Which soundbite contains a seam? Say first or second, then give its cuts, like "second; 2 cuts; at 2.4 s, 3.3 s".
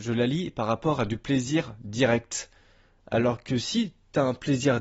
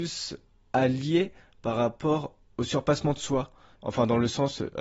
second; 1 cut; at 3.8 s